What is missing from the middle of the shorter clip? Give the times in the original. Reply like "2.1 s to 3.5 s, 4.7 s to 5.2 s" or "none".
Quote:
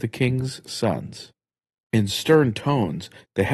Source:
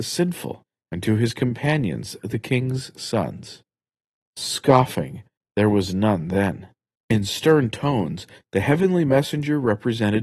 4.1 s to 6.9 s